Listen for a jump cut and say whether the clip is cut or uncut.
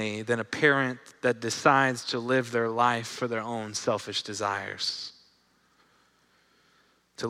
uncut